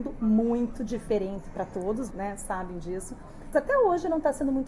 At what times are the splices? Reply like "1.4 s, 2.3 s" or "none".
2.1 s, 3.5 s